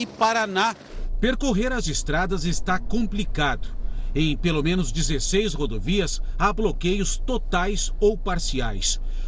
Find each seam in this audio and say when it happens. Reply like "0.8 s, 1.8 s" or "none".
none